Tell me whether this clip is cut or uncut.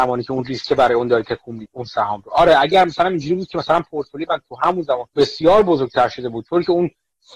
cut